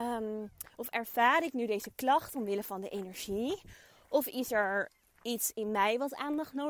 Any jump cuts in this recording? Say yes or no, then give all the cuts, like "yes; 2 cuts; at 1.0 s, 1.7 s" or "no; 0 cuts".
yes; 1 cut; at 2.3 s